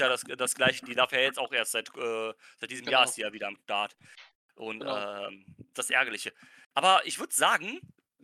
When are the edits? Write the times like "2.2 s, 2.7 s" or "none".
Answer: 5.7 s